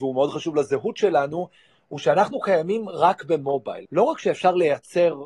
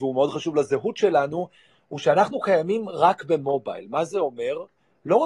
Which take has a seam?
first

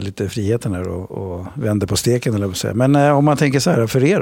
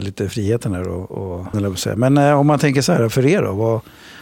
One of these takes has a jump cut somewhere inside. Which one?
second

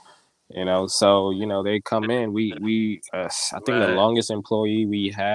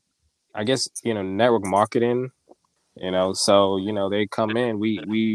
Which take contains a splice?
second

